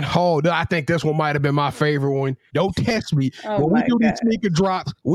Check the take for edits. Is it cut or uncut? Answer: cut